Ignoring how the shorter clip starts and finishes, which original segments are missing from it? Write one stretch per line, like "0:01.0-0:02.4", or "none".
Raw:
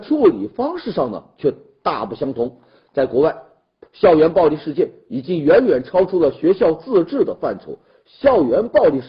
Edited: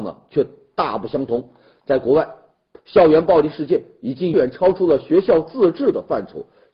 0:05.4-0:05.7